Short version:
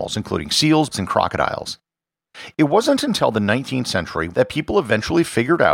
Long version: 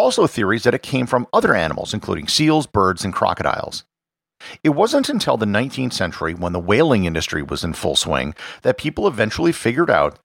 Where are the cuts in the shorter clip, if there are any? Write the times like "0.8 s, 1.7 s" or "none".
0.9 s, 4.3 s

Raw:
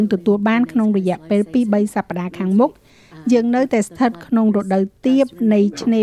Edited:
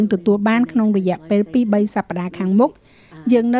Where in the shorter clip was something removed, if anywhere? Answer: none

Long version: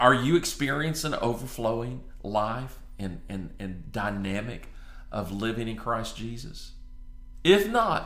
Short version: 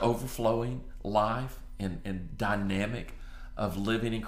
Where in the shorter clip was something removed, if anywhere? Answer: 2.0 s

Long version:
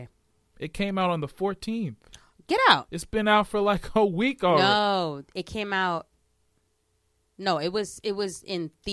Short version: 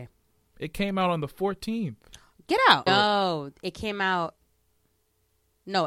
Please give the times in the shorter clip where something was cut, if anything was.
2.9 s

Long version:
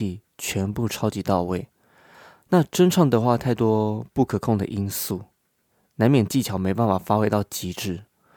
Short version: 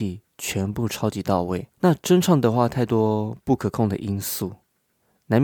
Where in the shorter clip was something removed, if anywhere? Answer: 1.7 s

